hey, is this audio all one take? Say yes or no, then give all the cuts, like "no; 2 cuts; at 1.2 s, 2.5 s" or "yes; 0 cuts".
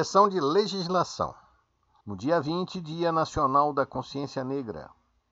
no; 1 cut; at 2.0 s